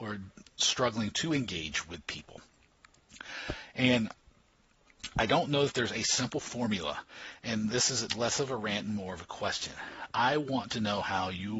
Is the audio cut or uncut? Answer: uncut